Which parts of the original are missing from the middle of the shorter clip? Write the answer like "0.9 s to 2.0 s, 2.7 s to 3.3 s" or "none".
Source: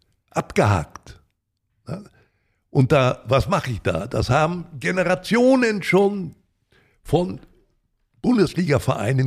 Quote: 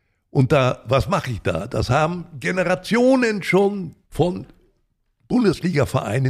6.4 s to 7.0 s